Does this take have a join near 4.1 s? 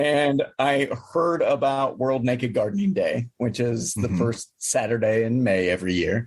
no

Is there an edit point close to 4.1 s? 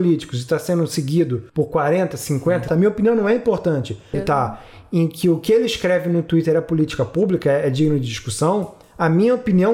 yes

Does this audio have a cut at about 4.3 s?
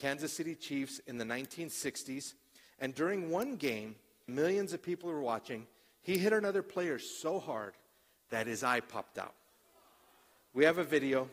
yes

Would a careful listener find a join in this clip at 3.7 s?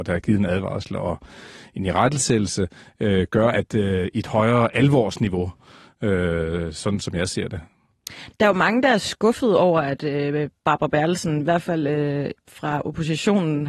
yes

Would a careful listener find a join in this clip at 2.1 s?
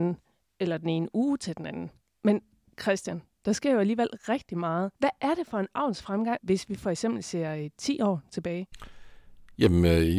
no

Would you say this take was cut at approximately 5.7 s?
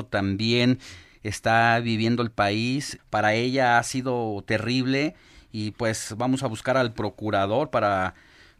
no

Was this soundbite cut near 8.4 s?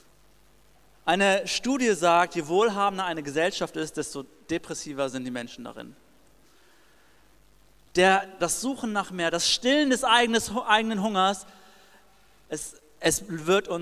yes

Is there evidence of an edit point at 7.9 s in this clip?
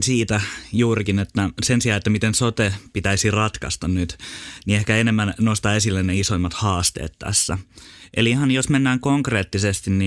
no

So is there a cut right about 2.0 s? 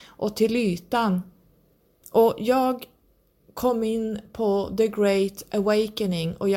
yes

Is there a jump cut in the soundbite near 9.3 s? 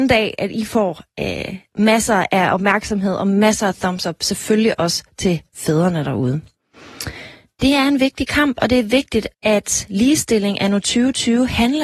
yes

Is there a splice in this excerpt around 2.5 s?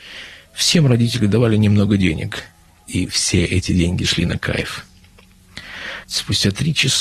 no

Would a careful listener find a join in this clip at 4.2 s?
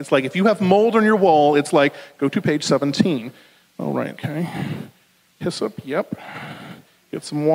yes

